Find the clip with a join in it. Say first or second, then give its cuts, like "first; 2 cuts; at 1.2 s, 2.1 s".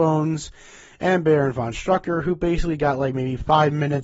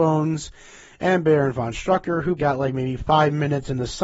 second; 1 cut; at 2.4 s